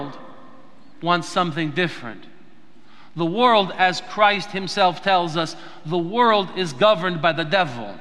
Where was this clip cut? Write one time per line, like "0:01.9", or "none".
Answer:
none